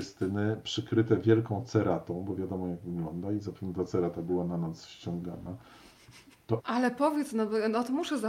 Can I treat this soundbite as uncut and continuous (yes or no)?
no